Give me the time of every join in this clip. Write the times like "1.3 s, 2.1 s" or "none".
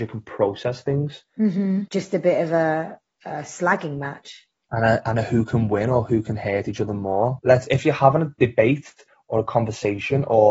1.9 s, 7.4 s